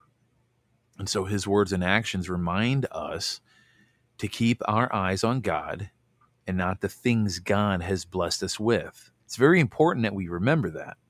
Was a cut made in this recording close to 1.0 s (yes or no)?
no